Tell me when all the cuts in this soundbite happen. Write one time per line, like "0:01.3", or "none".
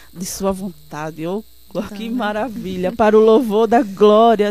0:01.9